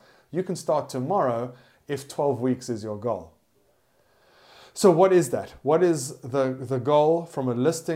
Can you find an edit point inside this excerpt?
no; 0 cuts

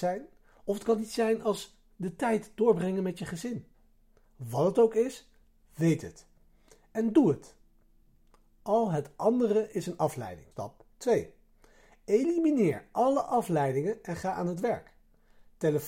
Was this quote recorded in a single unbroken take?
no; 1 cut; at 10.5 s

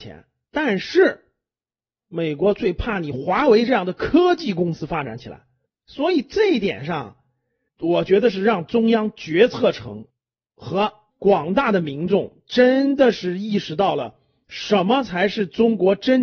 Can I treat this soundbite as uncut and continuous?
yes; 0 cuts

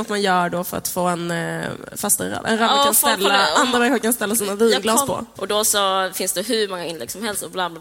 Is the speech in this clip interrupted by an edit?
yes; 1 cut; at 5.3 s

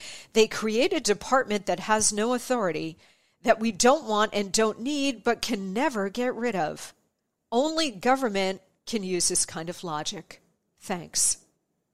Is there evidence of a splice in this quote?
no; 0 cuts

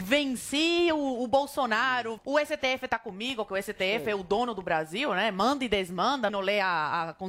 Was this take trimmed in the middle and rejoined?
yes; 2 cuts; at 2.2 s, 6.3 s

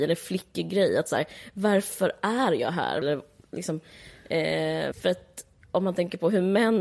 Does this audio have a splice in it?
yes; 2 cuts; at 3.0 s, 4.9 s

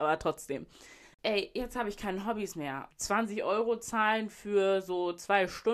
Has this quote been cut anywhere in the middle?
yes; 2 cuts; at 1.1 s, 2.9 s

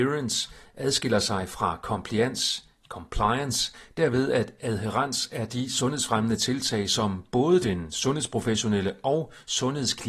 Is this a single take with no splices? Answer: yes; 0 cuts

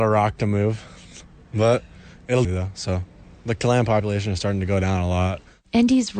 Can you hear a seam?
yes; 1 cut; at 2.4 s

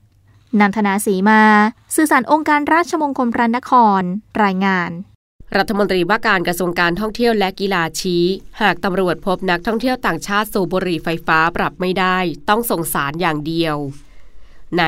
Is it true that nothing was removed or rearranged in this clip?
yes; 0 cuts

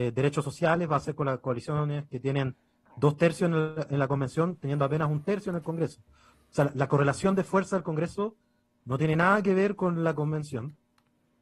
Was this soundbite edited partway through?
no; 0 cuts

